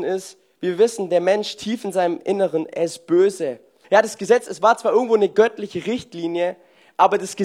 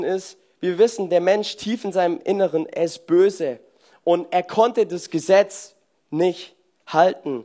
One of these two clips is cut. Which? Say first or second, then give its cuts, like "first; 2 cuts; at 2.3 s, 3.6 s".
first; 1 cut; at 3.8 s